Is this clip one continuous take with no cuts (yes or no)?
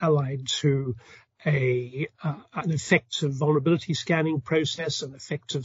yes